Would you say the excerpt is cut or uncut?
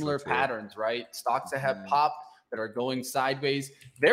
uncut